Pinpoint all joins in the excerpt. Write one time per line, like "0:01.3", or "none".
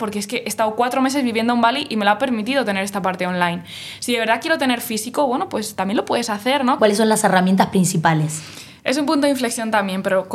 0:06.8

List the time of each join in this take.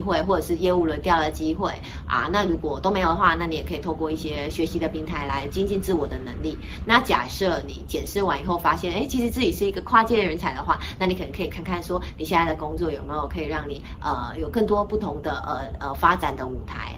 none

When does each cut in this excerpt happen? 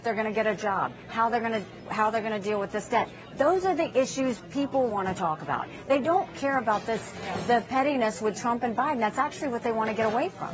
0:04.9

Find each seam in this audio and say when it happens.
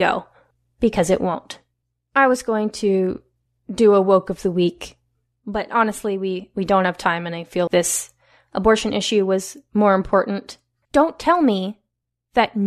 0:07.7
0:10.8

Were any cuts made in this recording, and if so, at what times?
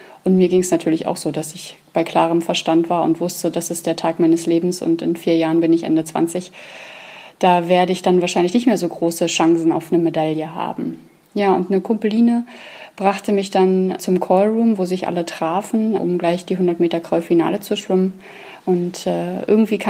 0:14.0
0:16.0
0:18.6

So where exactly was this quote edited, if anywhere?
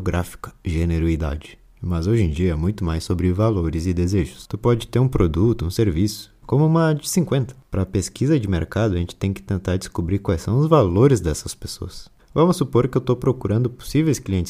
0:06.4
0:12.2

